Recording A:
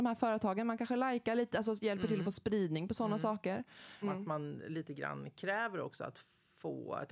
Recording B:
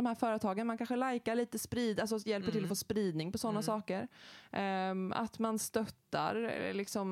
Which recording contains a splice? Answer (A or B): A